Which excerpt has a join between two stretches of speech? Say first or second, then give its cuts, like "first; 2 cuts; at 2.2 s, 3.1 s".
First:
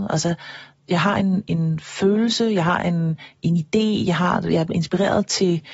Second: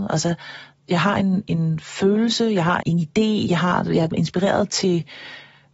second; 1 cut; at 2.8 s